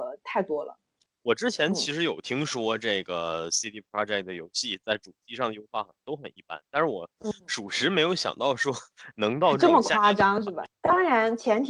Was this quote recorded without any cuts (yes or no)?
no